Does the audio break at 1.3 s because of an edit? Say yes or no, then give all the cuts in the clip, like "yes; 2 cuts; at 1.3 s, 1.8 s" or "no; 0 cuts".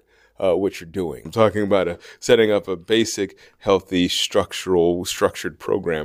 yes; 1 cut; at 1.3 s